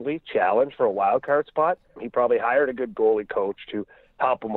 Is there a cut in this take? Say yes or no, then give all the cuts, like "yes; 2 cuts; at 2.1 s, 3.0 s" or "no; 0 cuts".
yes; 1 cut; at 2.0 s